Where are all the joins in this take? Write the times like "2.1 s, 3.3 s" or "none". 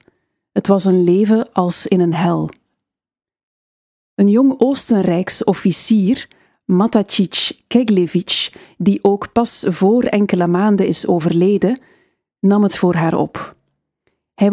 none